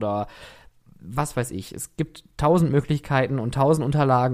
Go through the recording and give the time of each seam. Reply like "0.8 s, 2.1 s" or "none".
none